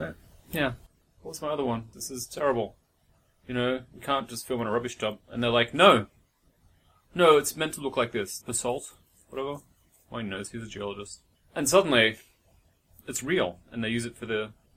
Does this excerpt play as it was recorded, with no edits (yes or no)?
no